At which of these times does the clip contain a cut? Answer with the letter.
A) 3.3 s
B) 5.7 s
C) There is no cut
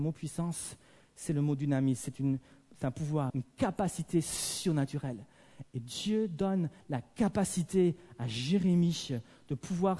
A